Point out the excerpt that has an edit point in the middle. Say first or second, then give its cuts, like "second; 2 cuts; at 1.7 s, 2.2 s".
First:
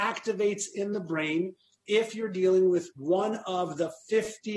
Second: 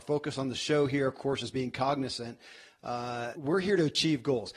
second; 1 cut; at 3.3 s